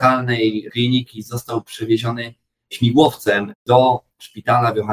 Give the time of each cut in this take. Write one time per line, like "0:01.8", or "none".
none